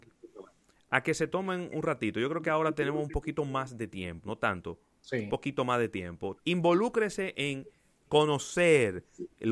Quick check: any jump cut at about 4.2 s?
yes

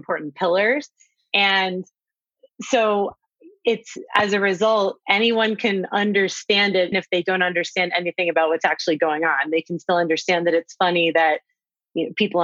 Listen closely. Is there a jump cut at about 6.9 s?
yes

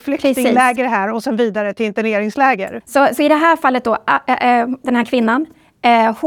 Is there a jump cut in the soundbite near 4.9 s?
no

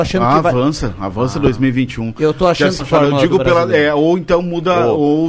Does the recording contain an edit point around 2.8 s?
yes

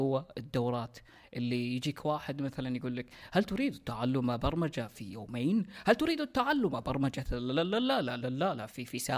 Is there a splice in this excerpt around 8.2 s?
yes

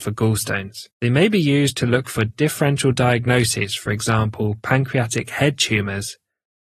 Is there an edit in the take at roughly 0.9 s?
yes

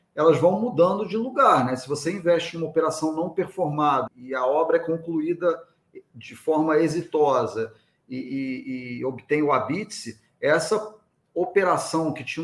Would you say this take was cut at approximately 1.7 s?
no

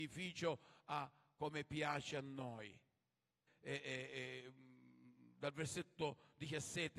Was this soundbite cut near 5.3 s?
no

